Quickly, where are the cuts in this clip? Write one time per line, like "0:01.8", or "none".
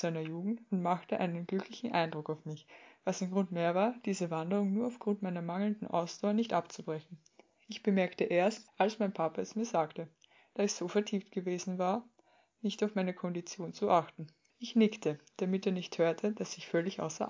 0:08.7
0:14.5